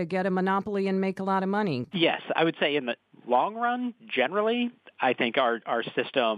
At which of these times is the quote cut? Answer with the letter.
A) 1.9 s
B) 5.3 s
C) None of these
A